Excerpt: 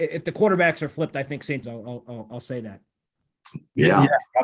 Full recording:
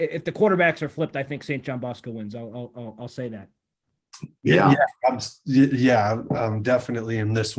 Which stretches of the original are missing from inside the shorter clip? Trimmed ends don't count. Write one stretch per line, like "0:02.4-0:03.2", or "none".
0:01.6-0:02.3